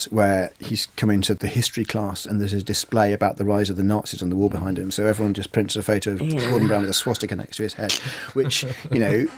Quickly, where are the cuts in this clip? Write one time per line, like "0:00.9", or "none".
none